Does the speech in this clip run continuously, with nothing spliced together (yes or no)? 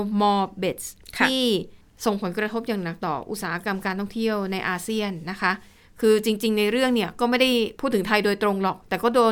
yes